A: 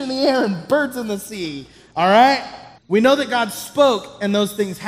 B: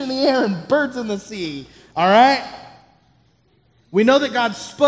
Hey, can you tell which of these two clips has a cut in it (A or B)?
A